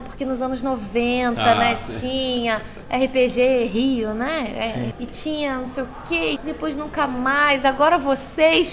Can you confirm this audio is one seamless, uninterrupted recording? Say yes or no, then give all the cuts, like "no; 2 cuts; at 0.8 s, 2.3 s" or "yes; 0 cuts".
no; 2 cuts; at 4.9 s, 6.4 s